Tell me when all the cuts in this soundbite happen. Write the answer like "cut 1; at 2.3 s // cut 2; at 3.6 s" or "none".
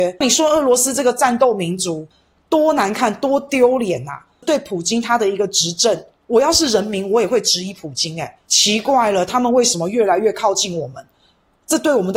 cut 1; at 8.4 s